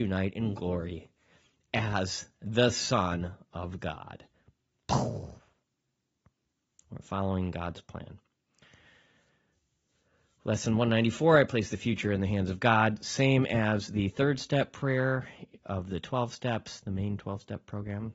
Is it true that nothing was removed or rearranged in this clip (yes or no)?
no